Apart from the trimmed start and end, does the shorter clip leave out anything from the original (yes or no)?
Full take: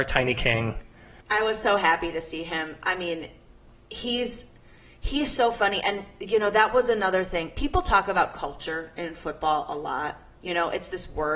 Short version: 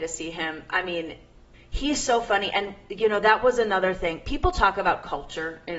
yes